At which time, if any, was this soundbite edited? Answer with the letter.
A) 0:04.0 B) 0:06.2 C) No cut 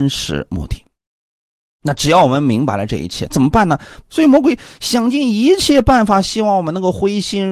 A